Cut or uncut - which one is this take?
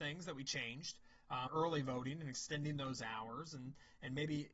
cut